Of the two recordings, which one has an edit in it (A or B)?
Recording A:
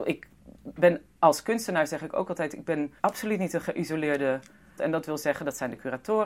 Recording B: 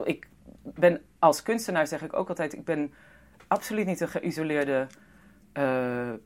A